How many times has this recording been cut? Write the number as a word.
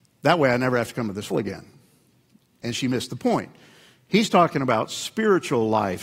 one